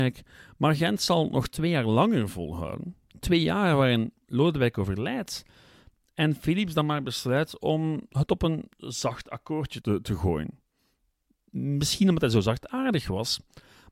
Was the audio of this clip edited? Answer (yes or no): yes